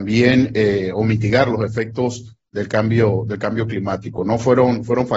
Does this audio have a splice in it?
no; 0 cuts

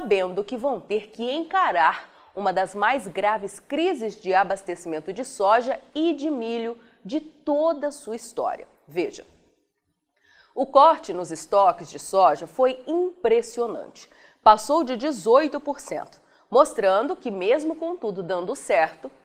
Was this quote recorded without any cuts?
yes; 0 cuts

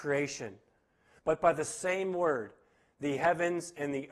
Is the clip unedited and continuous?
no; 1 cut; at 1.2 s

